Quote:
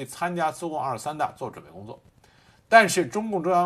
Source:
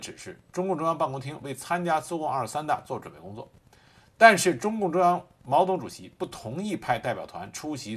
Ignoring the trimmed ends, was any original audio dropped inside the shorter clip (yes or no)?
no